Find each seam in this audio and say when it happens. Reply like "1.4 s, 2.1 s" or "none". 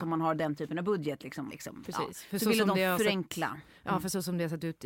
1.5 s